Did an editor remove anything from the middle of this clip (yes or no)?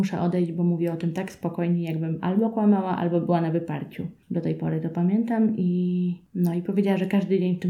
no